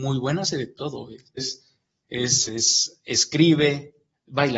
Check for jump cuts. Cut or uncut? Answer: cut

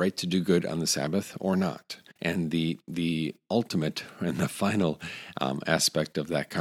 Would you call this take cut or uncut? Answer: cut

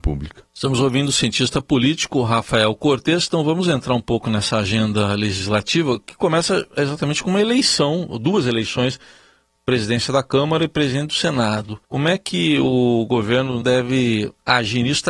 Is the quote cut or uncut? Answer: cut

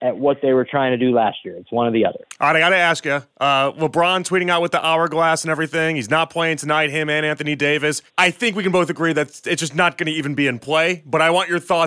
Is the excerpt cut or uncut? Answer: cut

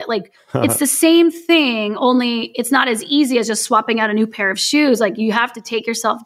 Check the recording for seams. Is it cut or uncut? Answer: uncut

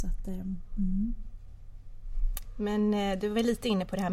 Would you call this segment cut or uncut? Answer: uncut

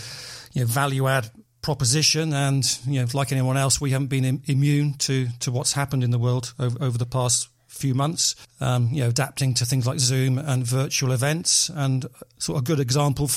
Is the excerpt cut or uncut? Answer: uncut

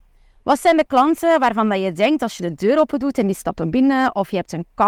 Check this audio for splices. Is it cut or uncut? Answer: uncut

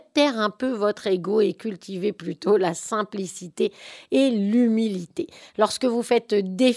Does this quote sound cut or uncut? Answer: cut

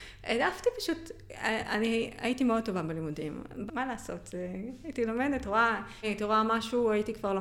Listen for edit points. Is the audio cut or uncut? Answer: cut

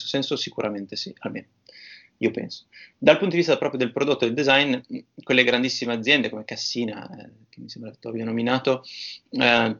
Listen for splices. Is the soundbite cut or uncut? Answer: uncut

